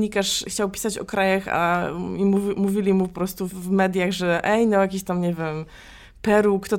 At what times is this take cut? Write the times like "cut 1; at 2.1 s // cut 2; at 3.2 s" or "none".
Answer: cut 1; at 3.5 s